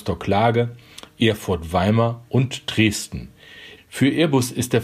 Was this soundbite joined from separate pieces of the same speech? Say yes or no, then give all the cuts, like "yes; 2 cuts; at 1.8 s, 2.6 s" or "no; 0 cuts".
yes; 1 cut; at 3.8 s